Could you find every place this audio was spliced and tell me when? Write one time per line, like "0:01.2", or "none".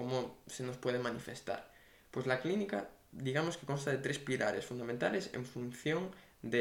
none